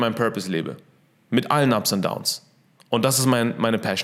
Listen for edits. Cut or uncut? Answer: uncut